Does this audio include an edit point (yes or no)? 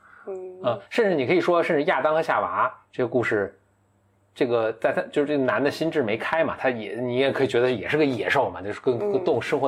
no